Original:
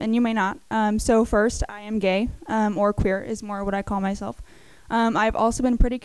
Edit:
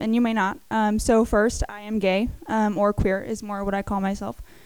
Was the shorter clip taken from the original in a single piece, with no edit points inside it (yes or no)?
yes